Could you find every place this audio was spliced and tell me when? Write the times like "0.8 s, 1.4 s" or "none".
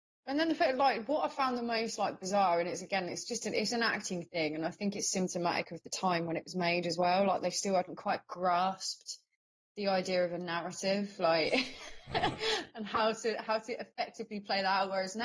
none

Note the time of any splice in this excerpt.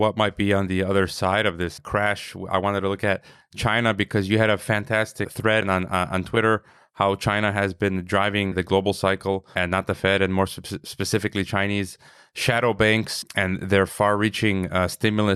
none

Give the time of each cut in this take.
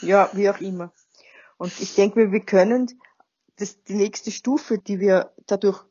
3.6 s, 4.8 s

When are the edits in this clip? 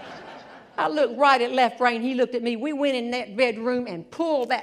none

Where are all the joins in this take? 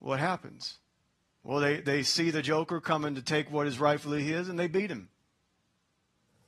1.3 s

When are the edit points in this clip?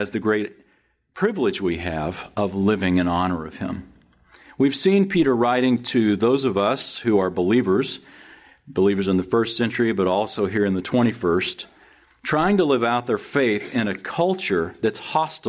none

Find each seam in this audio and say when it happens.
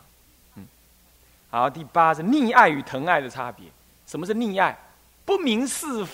none

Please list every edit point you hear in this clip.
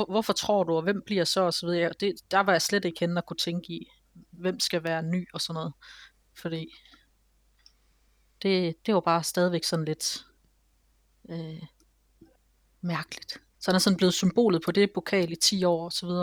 13.5 s, 14.9 s

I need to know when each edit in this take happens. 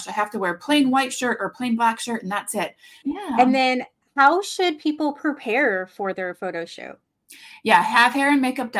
3.0 s

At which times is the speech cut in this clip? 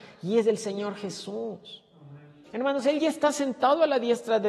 2.4 s

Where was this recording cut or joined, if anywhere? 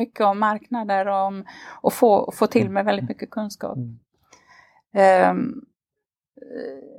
none

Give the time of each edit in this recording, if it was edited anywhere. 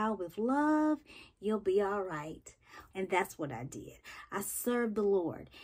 2.9 s

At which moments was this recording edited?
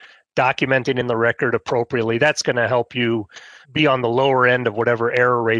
3.6 s

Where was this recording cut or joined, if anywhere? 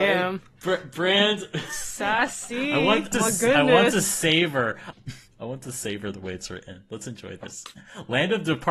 3.1 s, 4.9 s

